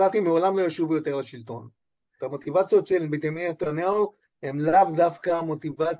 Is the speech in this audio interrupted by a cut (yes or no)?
yes